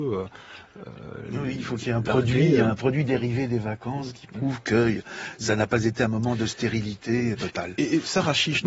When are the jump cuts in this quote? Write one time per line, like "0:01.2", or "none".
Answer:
0:07.3